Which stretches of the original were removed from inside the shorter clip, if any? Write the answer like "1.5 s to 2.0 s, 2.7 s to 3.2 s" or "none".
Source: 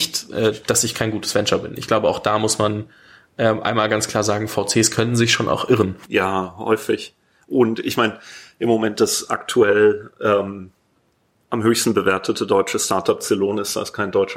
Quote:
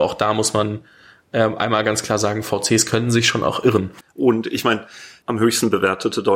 6.1 s to 7.3 s, 8.5 s to 11.5 s